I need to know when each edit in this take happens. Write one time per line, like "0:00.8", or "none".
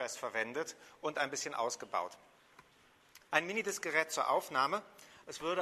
0:03.3